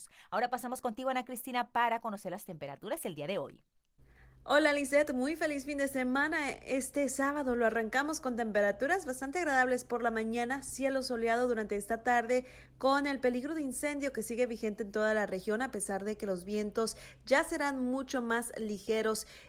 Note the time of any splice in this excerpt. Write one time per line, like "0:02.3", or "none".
none